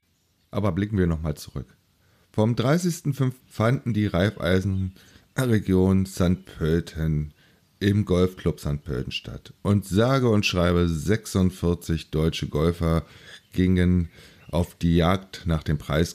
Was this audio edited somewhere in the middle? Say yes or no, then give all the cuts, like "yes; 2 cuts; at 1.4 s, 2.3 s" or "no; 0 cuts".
yes; 1 cut; at 3.4 s